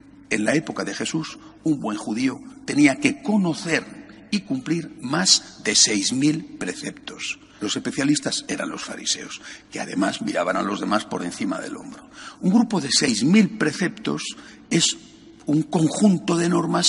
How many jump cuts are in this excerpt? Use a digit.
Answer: 1